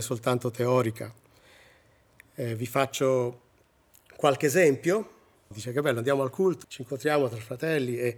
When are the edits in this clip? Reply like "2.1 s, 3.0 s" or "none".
5.5 s, 6.6 s